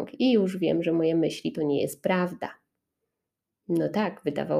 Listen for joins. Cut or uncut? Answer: uncut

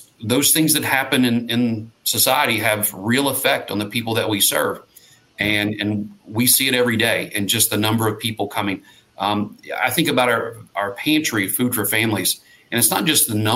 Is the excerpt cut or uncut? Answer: uncut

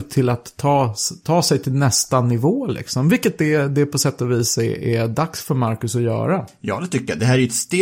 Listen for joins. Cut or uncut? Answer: uncut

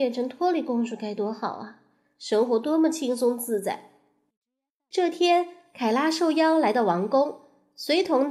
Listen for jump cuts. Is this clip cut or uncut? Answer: uncut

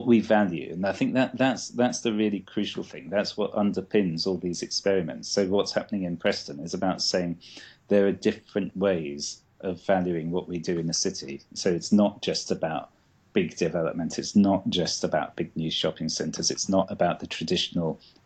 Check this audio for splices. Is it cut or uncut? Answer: uncut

